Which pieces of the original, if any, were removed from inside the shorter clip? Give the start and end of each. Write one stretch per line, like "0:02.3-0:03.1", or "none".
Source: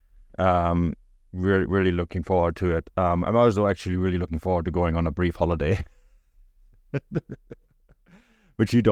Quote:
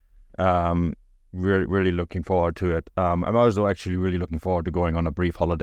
none